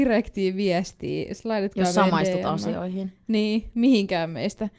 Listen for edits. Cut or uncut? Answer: uncut